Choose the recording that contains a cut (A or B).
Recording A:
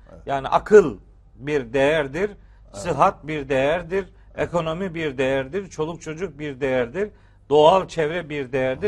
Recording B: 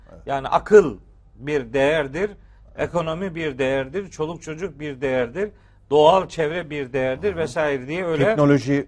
B